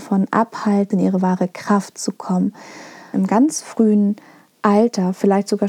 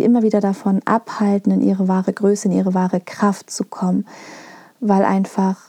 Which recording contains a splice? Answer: first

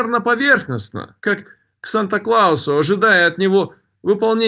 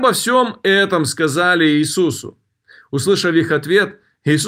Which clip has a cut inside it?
first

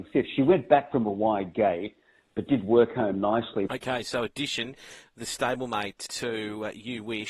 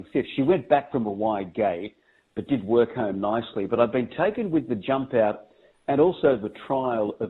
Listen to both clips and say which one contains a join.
first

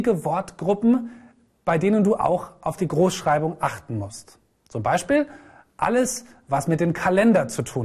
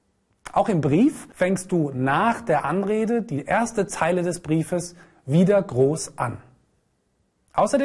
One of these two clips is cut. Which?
second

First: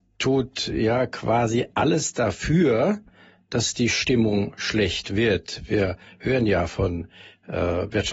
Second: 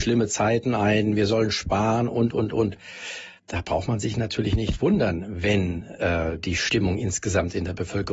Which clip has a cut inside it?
second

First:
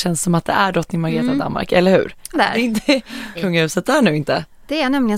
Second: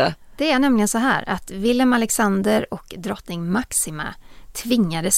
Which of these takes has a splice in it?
first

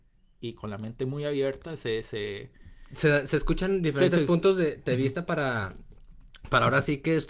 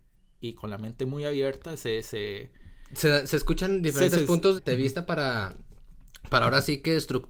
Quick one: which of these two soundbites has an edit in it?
second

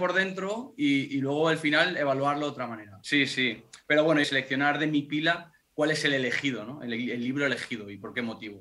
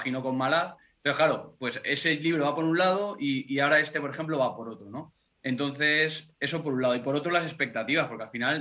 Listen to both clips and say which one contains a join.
first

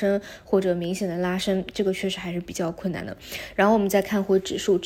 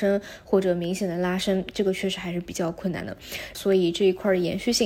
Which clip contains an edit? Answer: second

